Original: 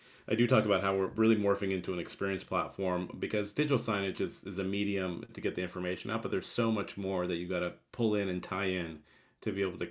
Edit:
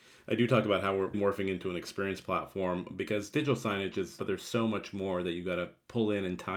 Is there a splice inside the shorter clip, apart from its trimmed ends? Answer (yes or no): yes